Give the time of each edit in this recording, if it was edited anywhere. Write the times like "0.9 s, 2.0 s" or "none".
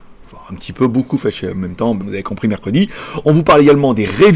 2.0 s